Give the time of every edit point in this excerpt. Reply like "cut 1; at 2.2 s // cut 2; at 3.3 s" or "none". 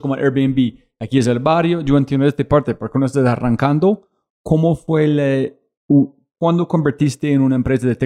none